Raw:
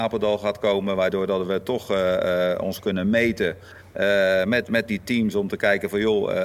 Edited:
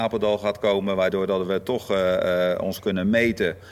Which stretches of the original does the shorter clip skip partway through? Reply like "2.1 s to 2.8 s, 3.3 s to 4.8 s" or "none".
none